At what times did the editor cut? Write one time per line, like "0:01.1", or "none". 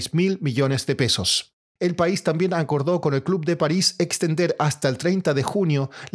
0:01.8

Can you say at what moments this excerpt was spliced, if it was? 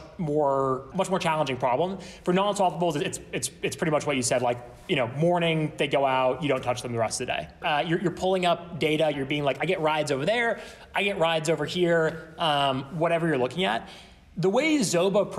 0:00.9
0:07.6
0:09.1

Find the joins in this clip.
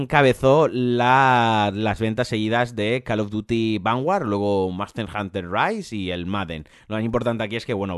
0:06.7

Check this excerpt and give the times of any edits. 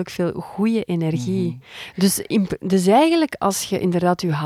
none

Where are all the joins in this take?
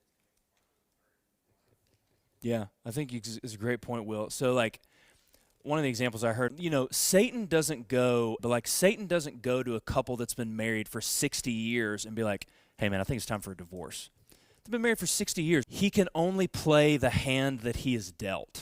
0:06.5
0:08.4
0:15.6

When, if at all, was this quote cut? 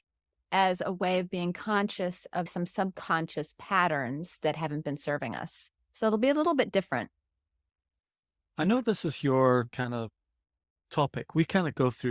0:02.5

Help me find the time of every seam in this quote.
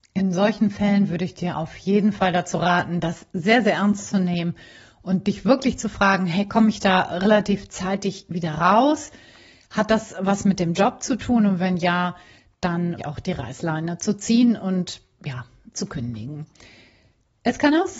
0:13.0
0:15.7

